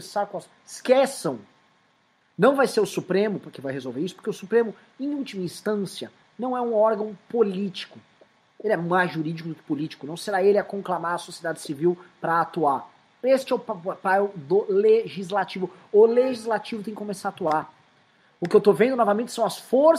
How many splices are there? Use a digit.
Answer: 0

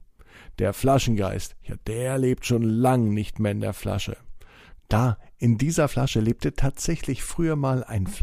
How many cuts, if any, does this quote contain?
1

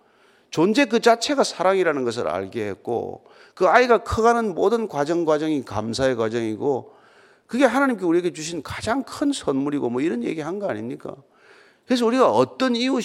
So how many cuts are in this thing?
0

